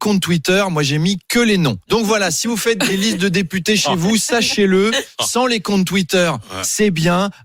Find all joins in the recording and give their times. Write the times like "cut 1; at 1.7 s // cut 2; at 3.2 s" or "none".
cut 1; at 1.8 s